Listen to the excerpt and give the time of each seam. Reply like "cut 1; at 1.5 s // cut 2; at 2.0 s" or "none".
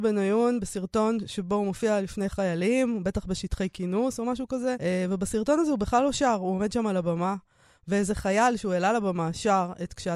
cut 1; at 4.8 s